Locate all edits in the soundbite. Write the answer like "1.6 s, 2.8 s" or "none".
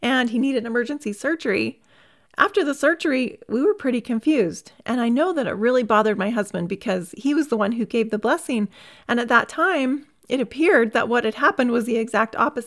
none